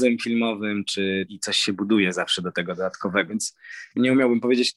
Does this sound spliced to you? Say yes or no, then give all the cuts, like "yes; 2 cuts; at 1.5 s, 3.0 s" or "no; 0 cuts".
yes; 2 cuts; at 1.3 s, 3.3 s